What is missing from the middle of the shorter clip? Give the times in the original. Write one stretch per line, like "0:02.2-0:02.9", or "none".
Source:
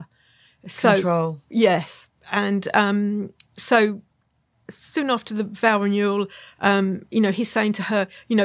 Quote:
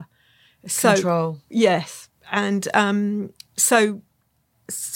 none